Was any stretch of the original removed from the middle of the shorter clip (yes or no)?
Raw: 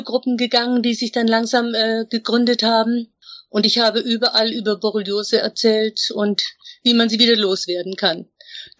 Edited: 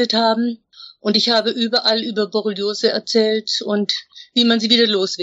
no